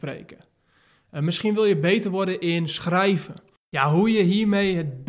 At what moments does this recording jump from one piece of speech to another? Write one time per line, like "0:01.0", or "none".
0:03.6